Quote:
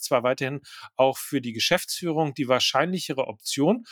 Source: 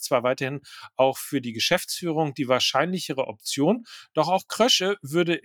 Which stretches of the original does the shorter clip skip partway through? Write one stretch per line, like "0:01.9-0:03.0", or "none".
none